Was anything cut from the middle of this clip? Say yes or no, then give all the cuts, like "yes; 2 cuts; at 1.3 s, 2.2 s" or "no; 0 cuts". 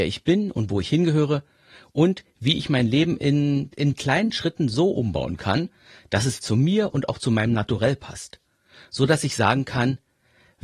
yes; 1 cut; at 6.4 s